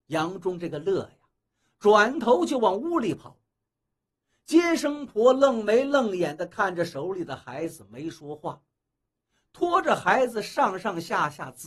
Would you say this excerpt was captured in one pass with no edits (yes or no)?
yes